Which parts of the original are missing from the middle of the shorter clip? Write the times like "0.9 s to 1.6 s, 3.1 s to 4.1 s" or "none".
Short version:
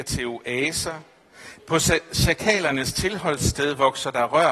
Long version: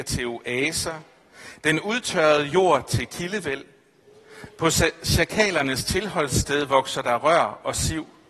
1.6 s to 4.5 s